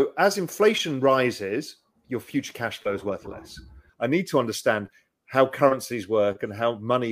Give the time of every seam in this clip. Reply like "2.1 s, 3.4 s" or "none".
1.9 s, 3.9 s